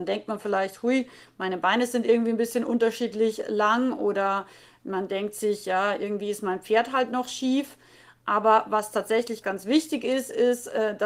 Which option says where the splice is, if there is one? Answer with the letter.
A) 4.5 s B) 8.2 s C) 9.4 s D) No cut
C